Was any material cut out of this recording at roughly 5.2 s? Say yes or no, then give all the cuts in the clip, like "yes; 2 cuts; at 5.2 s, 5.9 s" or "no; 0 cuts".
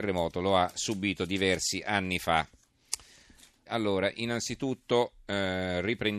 no; 1 cut; at 3.7 s